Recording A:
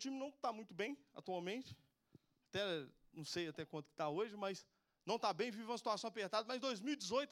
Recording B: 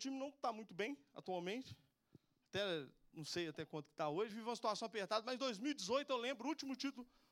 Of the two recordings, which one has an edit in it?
B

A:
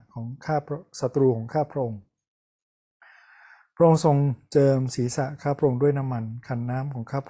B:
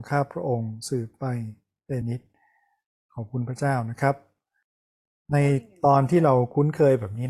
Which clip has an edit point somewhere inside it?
B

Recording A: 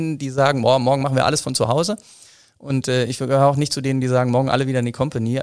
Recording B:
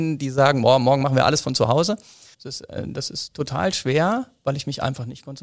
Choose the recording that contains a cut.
B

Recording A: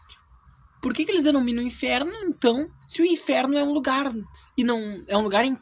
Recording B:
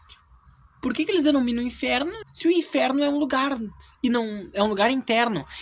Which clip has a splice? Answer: B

